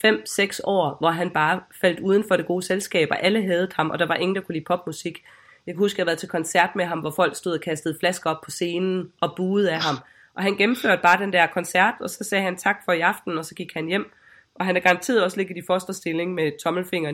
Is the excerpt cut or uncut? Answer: uncut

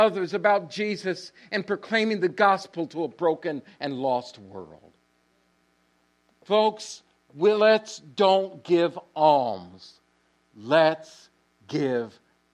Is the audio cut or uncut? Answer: uncut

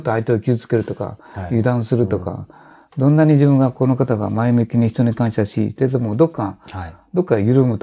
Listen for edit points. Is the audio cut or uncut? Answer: uncut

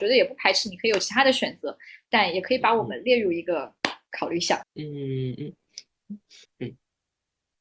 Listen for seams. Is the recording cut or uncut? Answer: cut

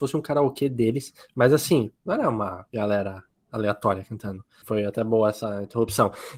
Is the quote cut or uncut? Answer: cut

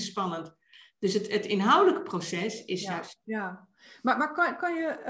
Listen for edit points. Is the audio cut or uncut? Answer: cut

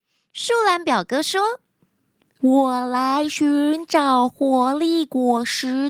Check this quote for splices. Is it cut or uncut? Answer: cut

